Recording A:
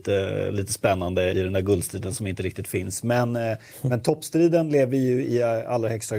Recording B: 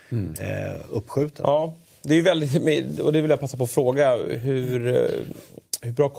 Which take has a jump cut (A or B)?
A